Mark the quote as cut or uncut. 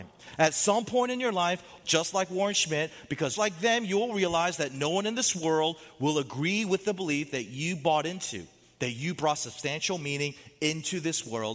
cut